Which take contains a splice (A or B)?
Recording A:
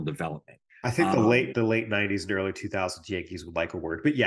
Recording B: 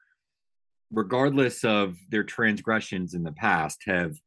A